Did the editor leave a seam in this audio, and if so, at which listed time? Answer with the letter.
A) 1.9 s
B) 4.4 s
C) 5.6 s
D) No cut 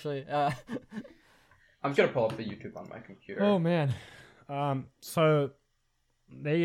A